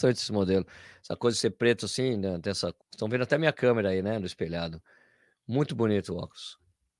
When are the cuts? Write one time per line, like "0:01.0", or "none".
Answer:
0:02.8